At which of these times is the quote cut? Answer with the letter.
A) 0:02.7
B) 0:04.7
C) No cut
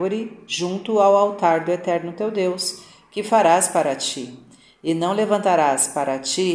C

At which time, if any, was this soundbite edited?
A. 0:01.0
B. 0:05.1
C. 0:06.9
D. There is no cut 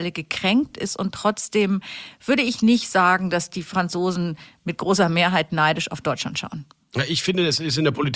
D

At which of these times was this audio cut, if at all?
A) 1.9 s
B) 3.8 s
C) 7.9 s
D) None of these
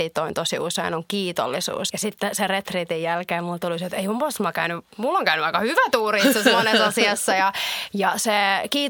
A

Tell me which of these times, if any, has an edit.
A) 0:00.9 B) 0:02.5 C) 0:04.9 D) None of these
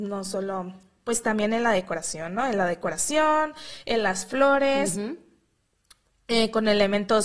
D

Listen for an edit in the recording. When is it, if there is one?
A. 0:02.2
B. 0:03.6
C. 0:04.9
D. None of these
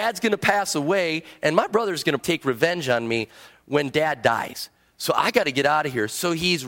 A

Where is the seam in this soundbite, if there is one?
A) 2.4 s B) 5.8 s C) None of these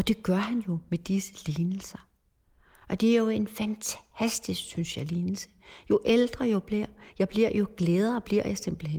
C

